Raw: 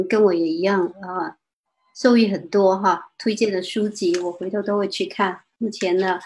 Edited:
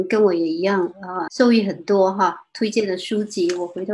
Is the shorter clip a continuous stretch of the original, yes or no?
no